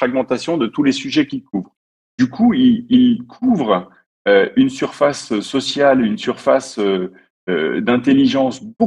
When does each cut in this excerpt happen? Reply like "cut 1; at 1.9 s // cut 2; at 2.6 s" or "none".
cut 1; at 6.0 s

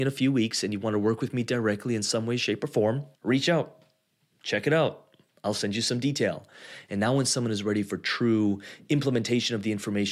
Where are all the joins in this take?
cut 1; at 3.1 s

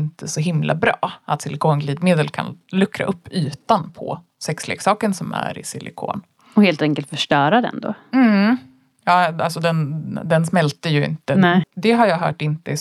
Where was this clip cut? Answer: cut 1; at 11.6 s

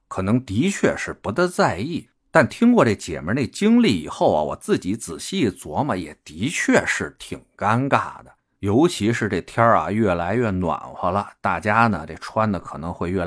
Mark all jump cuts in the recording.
none

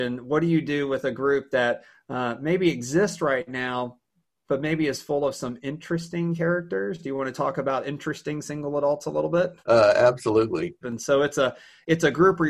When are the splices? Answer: cut 1; at 9.6 s // cut 2; at 10.8 s

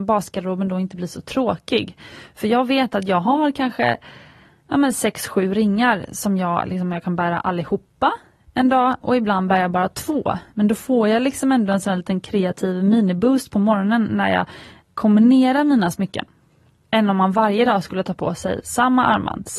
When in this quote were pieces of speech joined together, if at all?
none

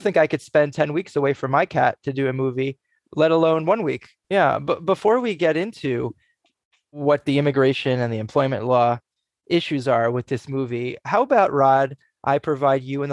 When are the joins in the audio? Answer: cut 1; at 4.2 s

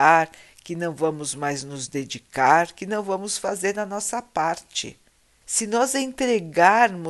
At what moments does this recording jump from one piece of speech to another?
cut 1; at 5.4 s

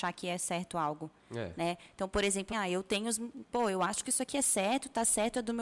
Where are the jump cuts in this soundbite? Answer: cut 1; at 2.5 s

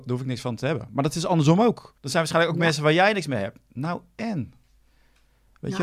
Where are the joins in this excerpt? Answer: cut 1; at 2.0 s

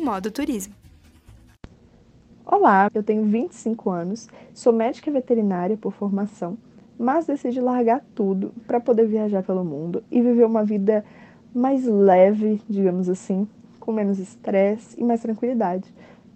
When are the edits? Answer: cut 1; at 2.9 s

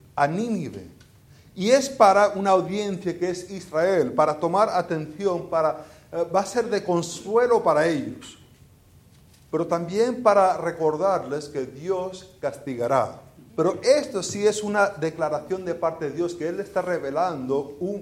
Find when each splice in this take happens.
cut 1; at 13.5 s

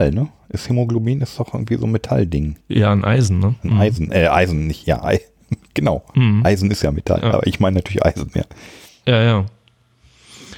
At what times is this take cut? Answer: cut 1; at 2.6 s

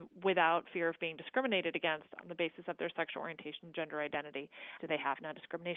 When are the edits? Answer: cut 1; at 4.8 s

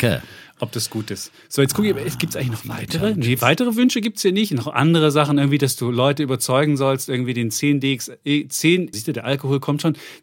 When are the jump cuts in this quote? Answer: cut 1; at 8.9 s

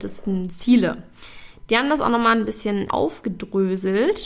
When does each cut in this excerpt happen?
cut 1; at 2.9 s

